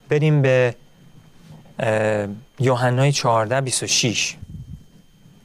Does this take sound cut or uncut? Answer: cut